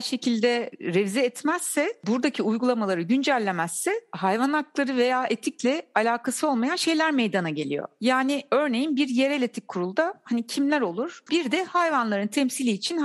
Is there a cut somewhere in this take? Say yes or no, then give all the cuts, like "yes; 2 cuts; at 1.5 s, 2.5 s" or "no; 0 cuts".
yes; 1 cut; at 11.3 s